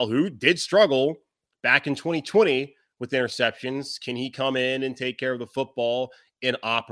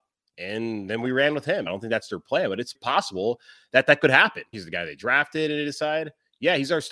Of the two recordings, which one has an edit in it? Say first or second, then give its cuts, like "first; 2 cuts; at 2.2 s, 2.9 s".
second; 3 cuts; at 1.7 s, 2.7 s, 4.5 s